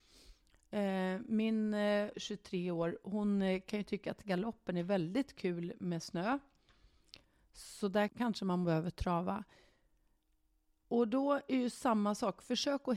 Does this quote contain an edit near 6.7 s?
no; 2 cuts; at 2.1 s, 8.1 s

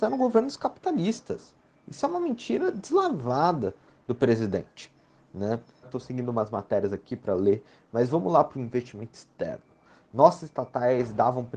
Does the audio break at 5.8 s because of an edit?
yes; 1 cut; at 5.8 s

